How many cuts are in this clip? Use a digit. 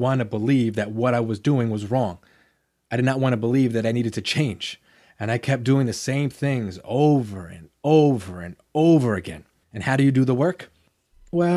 1